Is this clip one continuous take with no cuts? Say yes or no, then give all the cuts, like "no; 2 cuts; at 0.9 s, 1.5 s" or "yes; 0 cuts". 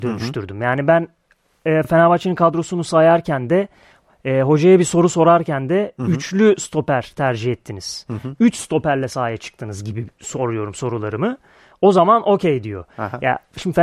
yes; 0 cuts